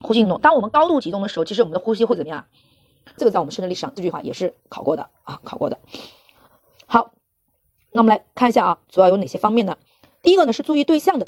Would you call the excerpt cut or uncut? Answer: cut